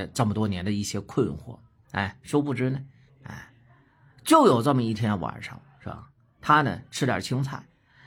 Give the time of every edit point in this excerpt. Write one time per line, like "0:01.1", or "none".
0:01.8
0:03.1